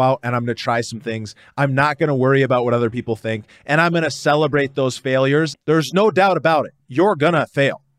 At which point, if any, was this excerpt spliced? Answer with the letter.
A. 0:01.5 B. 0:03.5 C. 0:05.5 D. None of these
C